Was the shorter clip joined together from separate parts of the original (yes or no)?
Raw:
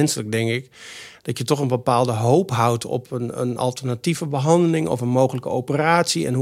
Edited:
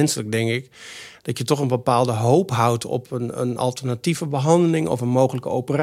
no